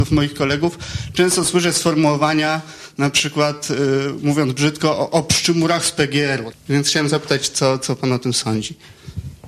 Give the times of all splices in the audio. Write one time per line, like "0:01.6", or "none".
0:06.5